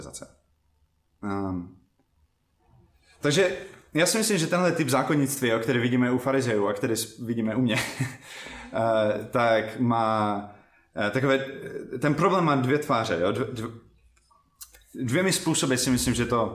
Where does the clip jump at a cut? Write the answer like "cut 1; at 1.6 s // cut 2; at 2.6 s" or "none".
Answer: none